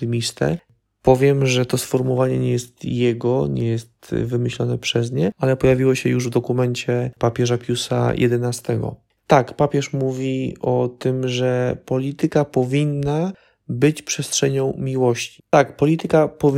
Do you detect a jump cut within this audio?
yes; 2 cuts; at 9.2 s, 15.4 s

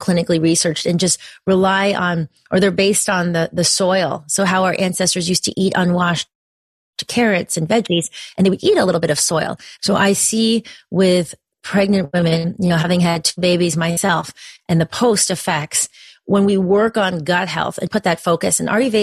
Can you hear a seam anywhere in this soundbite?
yes; 2 cuts; at 9.8 s, 17.9 s

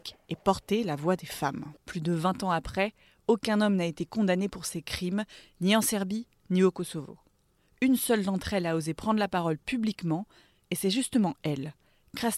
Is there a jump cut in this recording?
yes; 1 cut; at 1.8 s

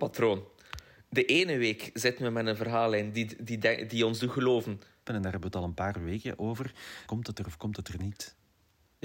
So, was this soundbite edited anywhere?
yes; 2 cuts; at 5.1 s, 7.1 s

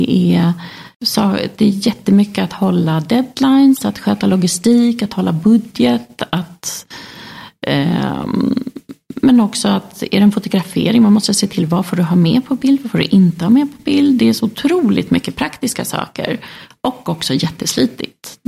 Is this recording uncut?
no; 1 cut; at 0.9 s

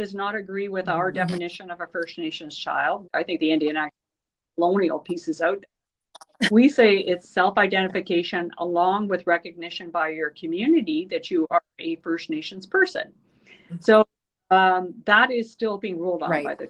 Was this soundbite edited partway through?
yes; 1 cut; at 3.0 s

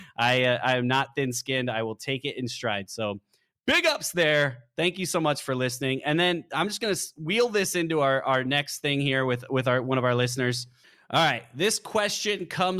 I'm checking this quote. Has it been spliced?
no; 0 cuts

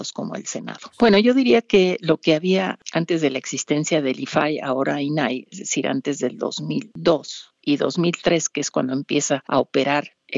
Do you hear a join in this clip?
yes; 1 cut; at 0.9 s

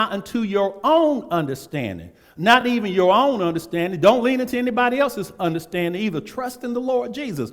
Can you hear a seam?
no; 0 cuts

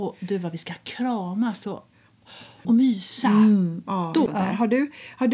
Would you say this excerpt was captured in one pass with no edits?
no; 2 cuts; at 2.6 s, 4.3 s

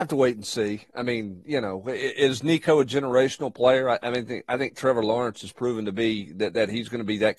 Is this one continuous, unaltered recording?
yes; 0 cuts

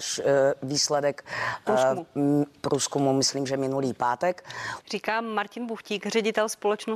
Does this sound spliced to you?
yes; 1 cut; at 4.8 s

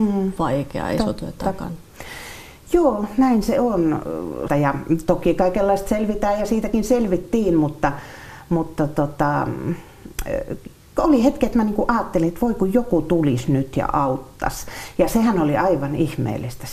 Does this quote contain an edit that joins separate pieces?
yes; 1 cut; at 4.5 s

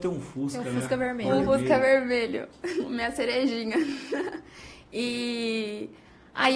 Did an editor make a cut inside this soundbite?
no; 0 cuts

